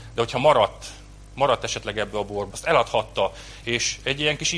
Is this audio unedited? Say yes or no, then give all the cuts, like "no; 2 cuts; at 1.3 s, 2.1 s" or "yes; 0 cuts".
no; 2 cuts; at 2.5 s, 3.6 s